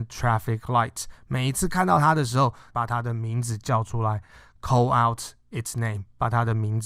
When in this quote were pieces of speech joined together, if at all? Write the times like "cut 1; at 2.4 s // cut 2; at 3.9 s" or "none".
cut 1; at 2.7 s